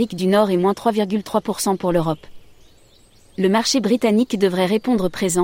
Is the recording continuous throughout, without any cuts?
yes; 0 cuts

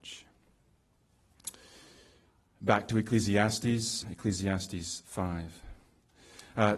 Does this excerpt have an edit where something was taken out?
yes; 1 cut; at 4.0 s

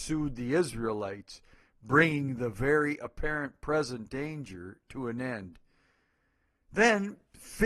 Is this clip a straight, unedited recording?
yes; 0 cuts

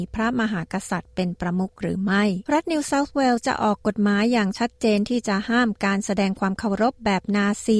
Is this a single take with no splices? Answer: no; 1 cut; at 2.4 s

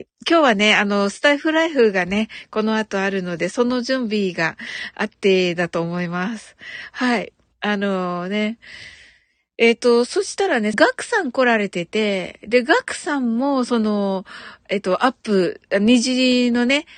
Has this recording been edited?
yes; 1 cut; at 10.7 s

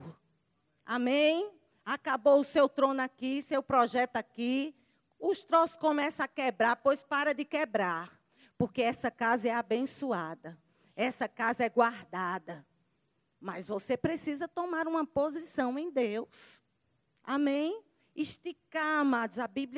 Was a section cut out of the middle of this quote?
no; 0 cuts

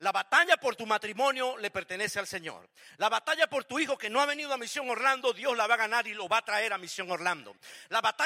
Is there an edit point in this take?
no; 0 cuts

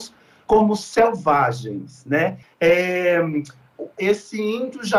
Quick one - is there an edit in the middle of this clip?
yes; 2 cuts; at 2.4 s, 4.0 s

